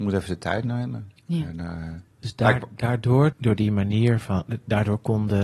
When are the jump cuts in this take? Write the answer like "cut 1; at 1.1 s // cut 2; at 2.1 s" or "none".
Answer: cut 1; at 1.2 s // cut 2; at 3.3 s